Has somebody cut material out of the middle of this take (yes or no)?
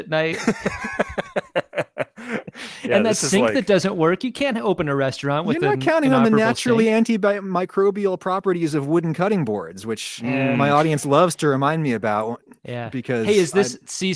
no